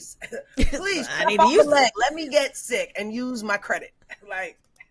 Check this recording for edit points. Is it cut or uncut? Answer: uncut